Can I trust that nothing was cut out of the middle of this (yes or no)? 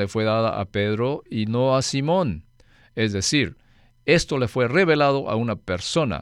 yes